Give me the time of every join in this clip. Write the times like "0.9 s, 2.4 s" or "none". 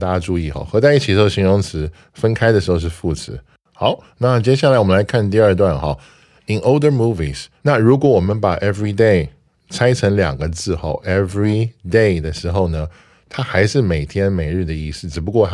7.6 s

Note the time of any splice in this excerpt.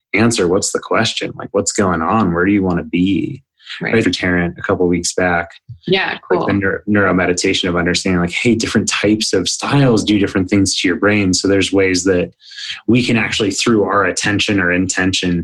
4.0 s

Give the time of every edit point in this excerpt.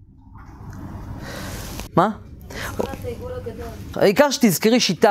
1.9 s, 3.9 s

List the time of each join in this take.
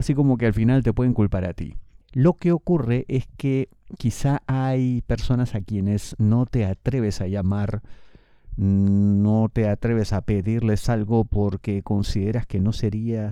2.0 s

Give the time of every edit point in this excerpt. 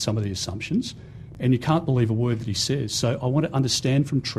none

